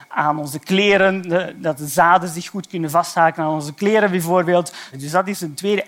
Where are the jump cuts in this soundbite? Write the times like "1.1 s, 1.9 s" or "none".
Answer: 4.9 s